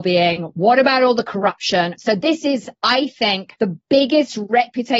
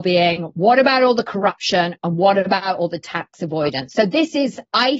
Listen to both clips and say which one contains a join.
first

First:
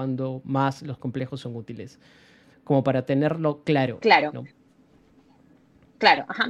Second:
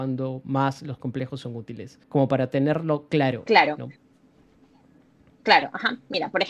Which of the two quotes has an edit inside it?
second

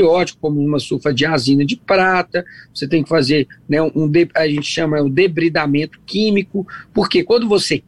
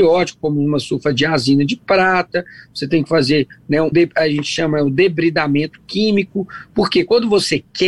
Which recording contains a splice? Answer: second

